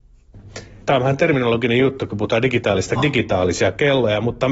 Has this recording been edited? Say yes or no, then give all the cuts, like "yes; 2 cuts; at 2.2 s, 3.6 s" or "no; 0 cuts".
yes; 1 cut; at 3.0 s